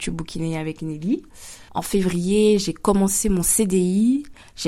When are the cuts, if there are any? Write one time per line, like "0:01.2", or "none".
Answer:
0:01.7